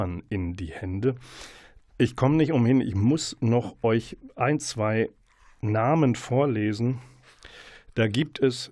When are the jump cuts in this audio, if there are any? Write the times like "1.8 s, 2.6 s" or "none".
none